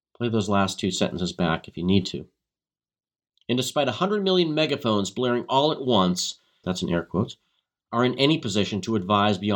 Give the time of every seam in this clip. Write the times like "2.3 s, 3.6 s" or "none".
6.6 s